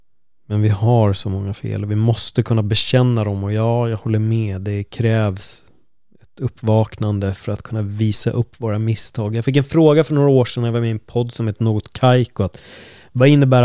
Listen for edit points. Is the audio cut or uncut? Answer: uncut